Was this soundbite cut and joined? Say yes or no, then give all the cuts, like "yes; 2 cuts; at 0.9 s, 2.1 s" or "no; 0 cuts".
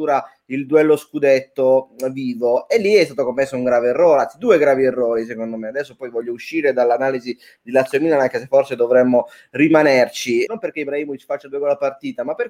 yes; 1 cut; at 10.5 s